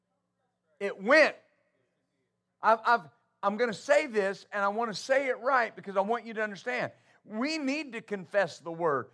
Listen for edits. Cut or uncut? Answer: cut